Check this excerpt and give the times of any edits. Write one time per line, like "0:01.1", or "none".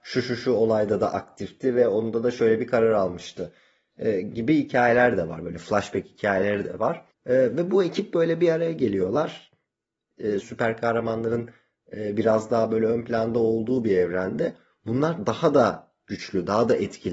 0:10.4